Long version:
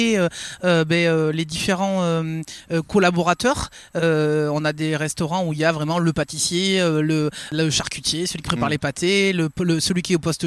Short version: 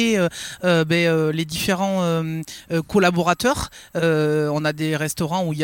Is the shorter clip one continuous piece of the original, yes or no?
yes